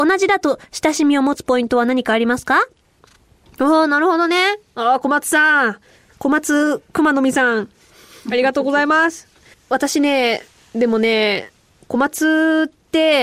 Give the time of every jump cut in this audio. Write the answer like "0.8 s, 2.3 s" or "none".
9.5 s